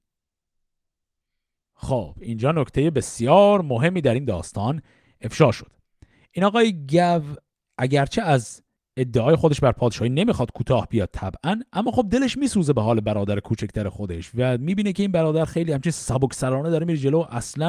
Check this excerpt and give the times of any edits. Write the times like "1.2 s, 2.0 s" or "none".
none